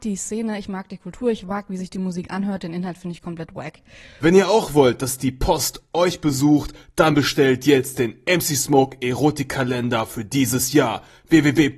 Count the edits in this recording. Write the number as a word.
one